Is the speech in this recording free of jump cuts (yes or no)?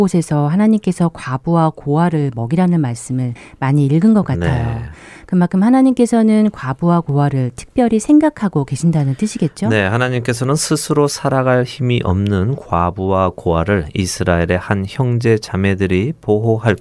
yes